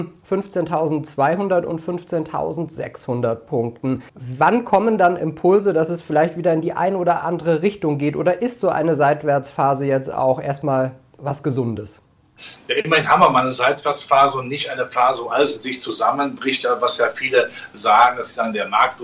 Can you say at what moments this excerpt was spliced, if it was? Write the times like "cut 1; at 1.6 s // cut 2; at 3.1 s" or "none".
cut 1; at 4.1 s